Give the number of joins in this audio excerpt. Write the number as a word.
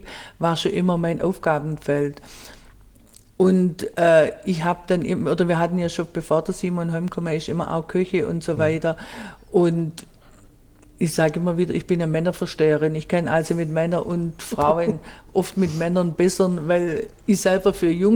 zero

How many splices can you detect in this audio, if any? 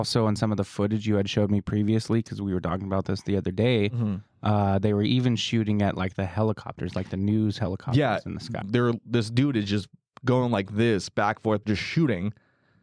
two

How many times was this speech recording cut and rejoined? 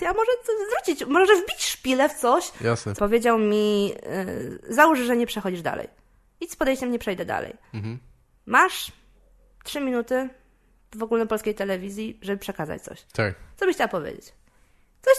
one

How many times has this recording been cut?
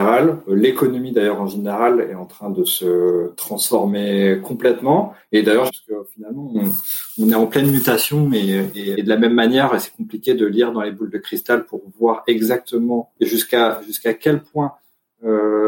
two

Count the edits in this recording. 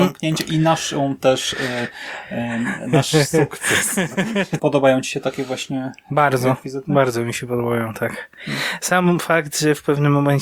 one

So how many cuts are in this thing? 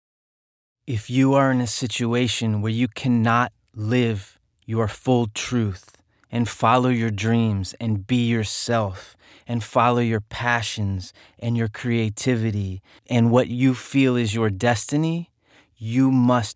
zero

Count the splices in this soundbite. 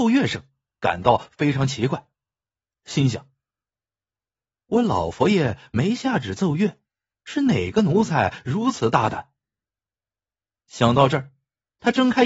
zero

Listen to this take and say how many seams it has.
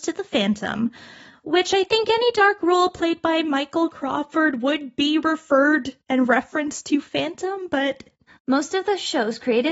one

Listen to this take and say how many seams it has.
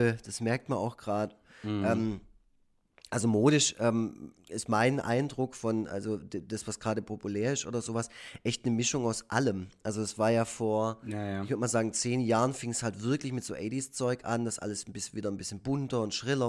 zero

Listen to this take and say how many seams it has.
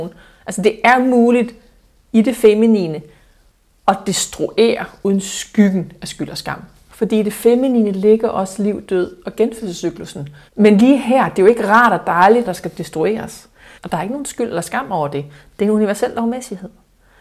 three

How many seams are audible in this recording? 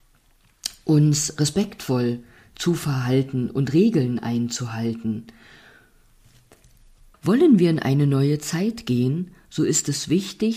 one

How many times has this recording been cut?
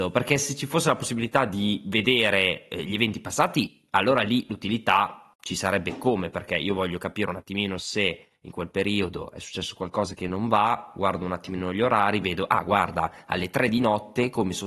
zero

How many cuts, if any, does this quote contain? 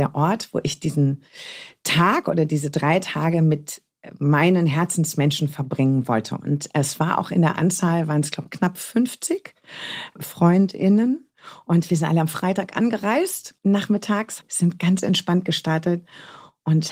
one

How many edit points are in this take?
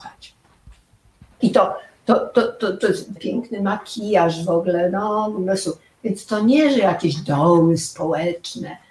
two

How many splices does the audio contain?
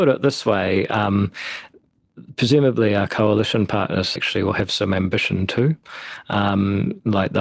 one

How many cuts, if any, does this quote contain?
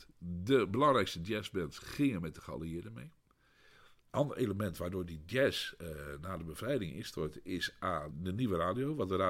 one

